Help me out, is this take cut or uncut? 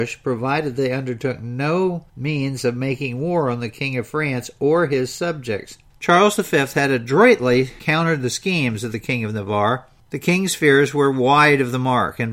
cut